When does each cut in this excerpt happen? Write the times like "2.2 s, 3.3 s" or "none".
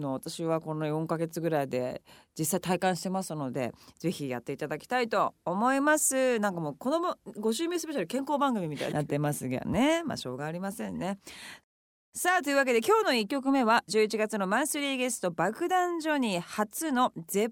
8.9 s